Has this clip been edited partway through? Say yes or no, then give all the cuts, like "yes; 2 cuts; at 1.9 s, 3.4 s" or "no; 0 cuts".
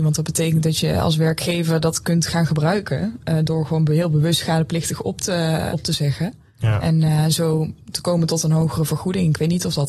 yes; 1 cut; at 5.7 s